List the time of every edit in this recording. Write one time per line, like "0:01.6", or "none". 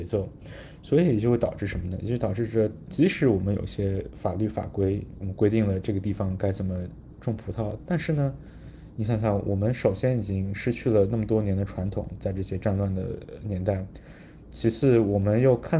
none